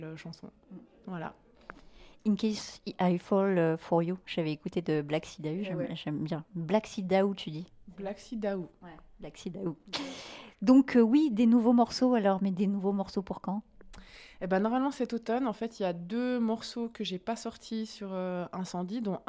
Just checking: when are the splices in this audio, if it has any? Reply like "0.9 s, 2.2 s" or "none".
none